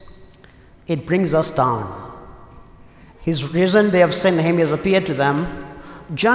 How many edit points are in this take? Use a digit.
1